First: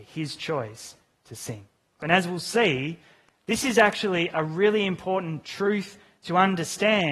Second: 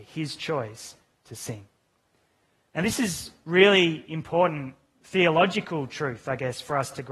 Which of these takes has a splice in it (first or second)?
first